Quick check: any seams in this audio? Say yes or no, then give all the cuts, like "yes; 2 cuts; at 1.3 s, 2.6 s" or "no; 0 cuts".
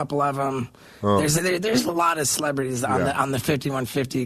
no; 0 cuts